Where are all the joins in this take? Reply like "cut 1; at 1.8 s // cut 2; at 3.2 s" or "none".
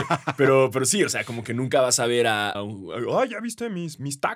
cut 1; at 2.5 s